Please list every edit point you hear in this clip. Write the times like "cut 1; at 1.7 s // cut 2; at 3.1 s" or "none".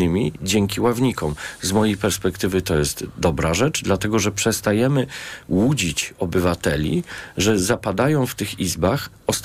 none